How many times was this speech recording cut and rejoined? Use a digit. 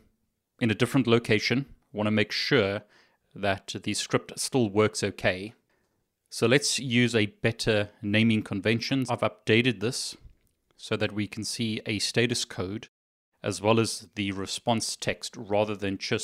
1